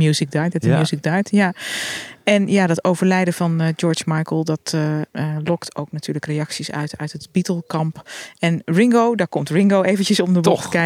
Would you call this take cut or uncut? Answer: uncut